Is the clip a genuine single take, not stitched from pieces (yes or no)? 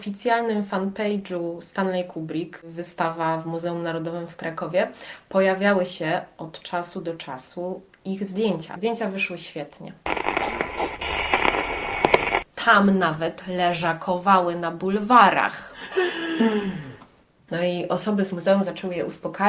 no